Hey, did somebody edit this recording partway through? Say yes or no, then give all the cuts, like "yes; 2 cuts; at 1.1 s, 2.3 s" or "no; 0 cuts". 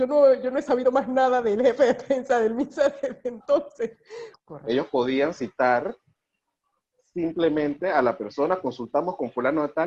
yes; 1 cut; at 4.3 s